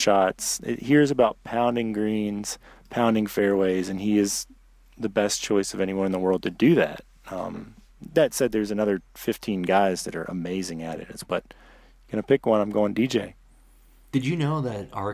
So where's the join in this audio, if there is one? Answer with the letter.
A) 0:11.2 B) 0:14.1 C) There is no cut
A